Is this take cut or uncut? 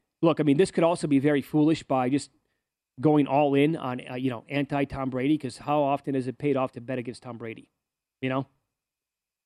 uncut